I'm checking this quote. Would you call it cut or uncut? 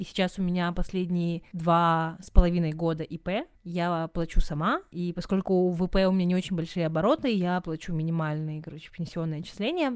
uncut